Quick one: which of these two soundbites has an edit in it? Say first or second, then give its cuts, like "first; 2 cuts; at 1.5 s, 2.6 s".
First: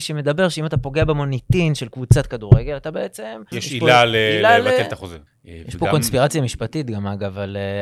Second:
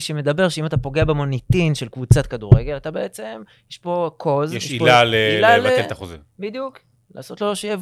first; 2 cuts; at 3.5 s, 5.3 s